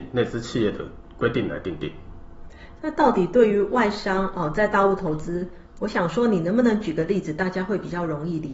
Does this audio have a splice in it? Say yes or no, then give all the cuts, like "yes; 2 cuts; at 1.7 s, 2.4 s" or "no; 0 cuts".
yes; 2 cuts; at 2.8 s, 5.7 s